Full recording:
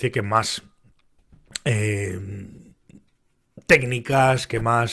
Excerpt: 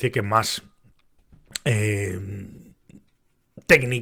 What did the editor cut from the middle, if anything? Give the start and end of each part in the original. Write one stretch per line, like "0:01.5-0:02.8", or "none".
none